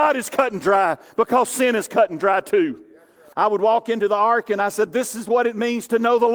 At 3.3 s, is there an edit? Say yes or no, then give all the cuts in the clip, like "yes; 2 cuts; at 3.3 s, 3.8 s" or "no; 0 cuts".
yes; 1 cut; at 3.3 s